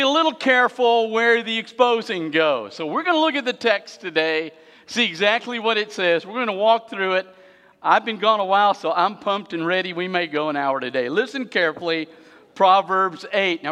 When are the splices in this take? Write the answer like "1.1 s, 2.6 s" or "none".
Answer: none